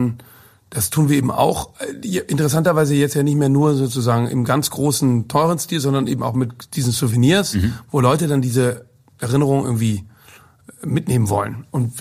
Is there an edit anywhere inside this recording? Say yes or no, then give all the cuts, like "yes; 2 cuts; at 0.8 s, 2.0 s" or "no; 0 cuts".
no; 0 cuts